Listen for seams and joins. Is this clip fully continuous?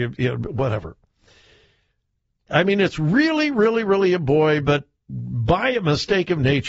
no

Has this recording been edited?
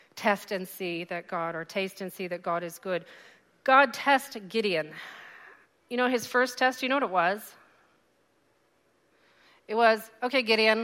no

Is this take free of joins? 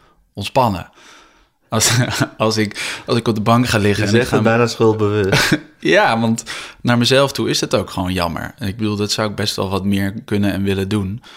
yes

